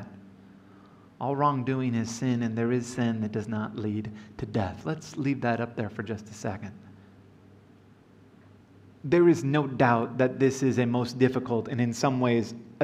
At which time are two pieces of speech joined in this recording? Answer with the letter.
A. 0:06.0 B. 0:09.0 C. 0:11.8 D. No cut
D